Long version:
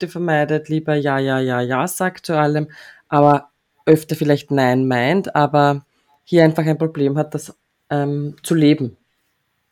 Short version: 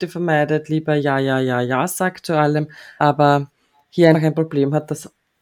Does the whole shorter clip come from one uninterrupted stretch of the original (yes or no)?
no